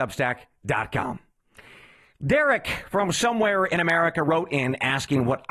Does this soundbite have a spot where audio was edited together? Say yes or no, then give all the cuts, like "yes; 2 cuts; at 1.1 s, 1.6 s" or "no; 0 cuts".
no; 0 cuts